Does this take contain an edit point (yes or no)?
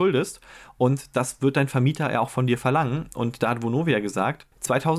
no